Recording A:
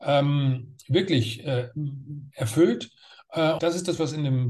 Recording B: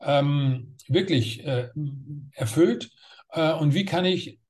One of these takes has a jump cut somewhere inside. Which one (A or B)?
A